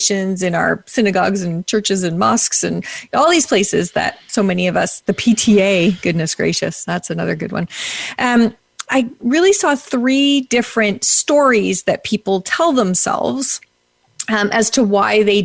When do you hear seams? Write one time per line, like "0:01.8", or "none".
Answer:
0:08.9